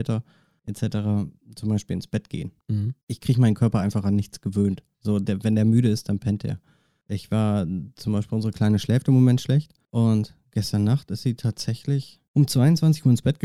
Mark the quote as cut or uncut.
uncut